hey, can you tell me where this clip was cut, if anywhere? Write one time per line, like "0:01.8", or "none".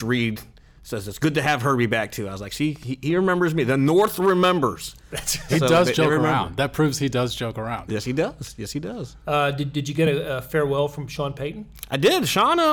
none